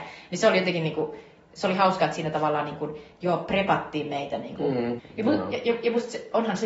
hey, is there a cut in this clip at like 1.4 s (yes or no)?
no